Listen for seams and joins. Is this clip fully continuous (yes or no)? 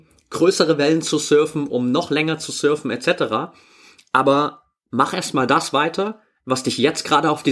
yes